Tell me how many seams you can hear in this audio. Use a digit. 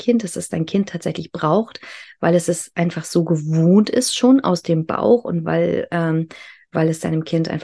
0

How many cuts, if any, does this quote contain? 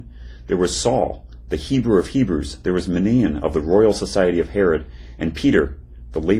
0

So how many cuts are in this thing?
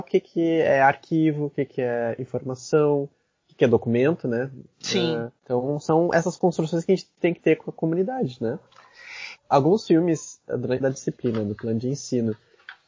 3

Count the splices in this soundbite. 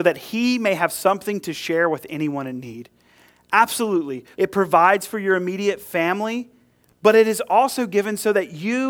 1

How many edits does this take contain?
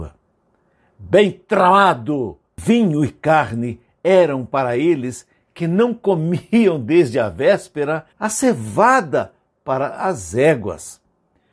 2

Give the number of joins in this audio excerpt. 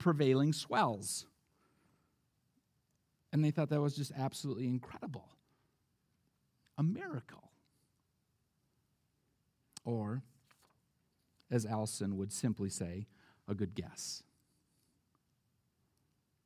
0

